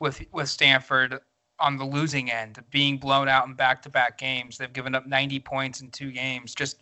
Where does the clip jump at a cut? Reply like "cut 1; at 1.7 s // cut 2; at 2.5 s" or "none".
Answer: none